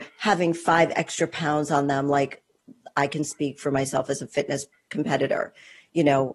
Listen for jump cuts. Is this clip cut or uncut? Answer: uncut